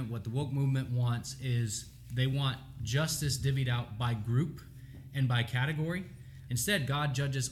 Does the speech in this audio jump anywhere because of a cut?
yes; 1 cut; at 6.5 s

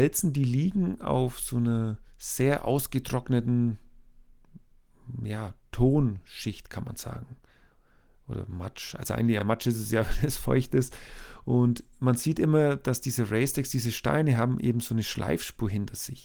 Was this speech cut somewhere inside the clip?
no; 0 cuts

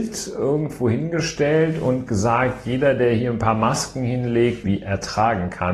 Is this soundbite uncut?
no; 1 cut; at 4.6 s

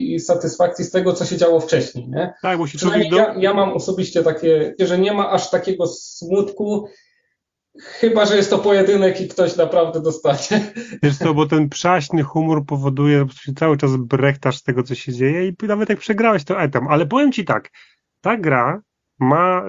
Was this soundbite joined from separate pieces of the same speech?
yes; 1 cut; at 4.8 s

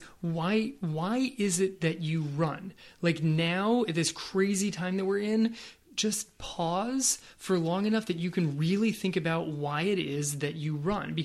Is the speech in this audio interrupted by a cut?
no; 0 cuts

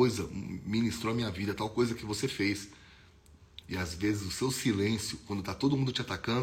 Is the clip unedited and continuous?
no; 1 cut; at 3.6 s

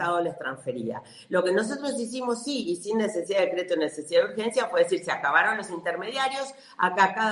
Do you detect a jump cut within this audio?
no; 0 cuts

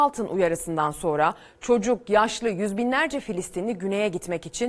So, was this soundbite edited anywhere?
no; 0 cuts

